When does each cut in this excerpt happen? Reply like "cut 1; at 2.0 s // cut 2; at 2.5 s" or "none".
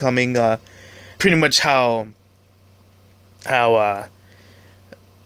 cut 1; at 1.1 s